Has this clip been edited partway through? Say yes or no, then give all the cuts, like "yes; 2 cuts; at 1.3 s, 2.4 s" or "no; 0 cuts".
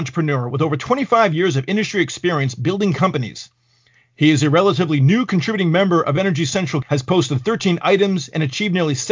no; 0 cuts